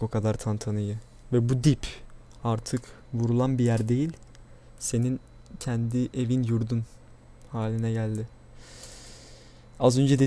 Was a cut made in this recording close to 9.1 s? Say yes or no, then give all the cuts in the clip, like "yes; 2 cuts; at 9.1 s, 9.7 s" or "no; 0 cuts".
no; 1 cut; at 1.2 s